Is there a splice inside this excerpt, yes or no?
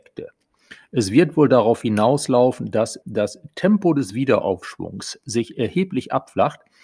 yes